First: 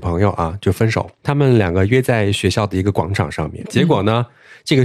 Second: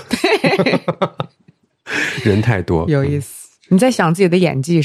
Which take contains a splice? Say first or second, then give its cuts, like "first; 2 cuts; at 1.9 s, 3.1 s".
first; 2 cuts; at 1.2 s, 3.6 s